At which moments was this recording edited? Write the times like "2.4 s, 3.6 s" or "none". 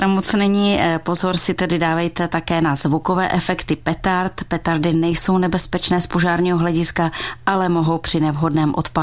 none